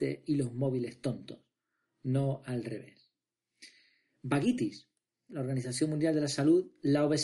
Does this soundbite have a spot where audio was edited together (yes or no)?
yes